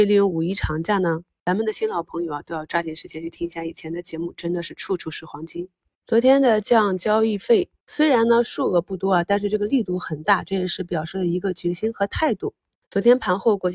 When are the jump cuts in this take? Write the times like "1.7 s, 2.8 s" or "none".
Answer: none